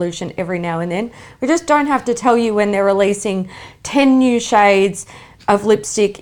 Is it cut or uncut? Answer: uncut